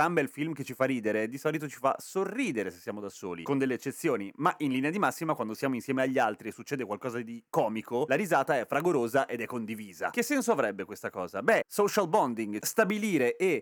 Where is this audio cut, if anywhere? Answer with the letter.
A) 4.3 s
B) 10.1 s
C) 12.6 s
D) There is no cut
C